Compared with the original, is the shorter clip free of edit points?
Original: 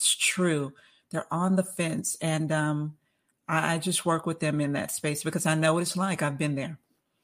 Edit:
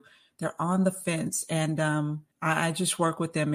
no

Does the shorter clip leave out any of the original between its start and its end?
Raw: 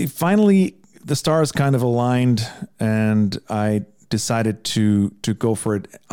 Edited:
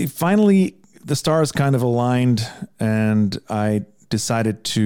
no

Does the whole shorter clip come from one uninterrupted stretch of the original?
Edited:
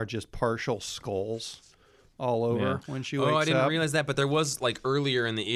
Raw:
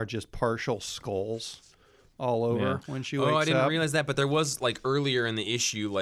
yes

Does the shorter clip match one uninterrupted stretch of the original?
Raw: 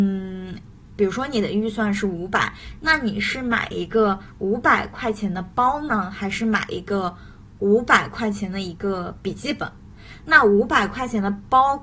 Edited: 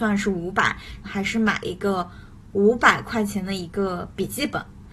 no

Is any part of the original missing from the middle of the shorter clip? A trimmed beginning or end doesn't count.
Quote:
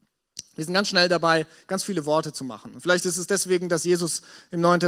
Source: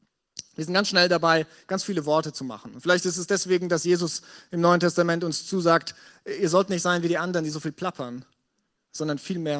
no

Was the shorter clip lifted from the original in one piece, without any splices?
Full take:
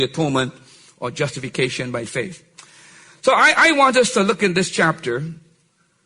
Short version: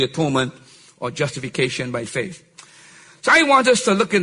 no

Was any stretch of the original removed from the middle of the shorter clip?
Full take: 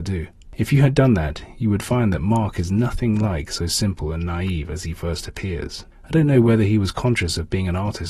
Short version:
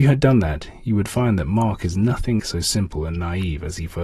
yes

